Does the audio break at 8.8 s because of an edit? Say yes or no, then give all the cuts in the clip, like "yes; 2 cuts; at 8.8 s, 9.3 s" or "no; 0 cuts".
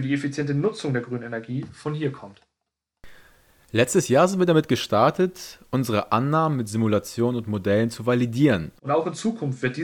yes; 1 cut; at 8.8 s